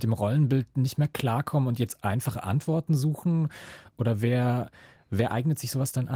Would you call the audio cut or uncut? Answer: uncut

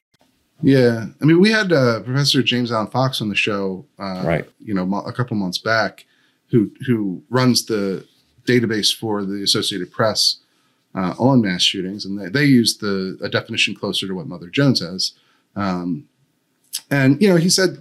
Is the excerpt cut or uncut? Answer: uncut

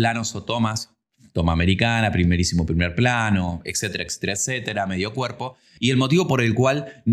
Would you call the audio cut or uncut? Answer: uncut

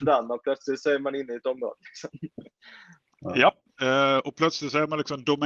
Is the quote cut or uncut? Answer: uncut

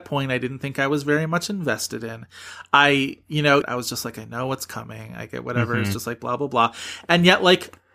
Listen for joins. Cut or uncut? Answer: cut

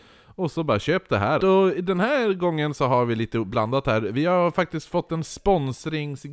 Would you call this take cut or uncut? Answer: cut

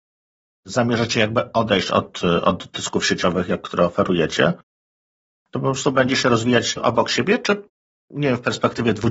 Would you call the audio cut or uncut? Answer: uncut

